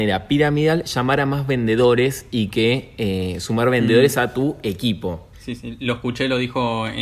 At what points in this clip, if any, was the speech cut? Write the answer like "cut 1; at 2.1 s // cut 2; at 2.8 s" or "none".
cut 1; at 5.3 s